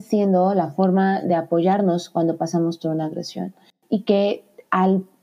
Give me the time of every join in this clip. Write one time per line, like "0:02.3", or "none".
none